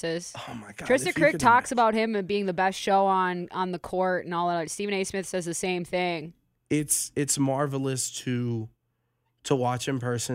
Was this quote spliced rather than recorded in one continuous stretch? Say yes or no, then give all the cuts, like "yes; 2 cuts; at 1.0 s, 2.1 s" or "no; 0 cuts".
no; 0 cuts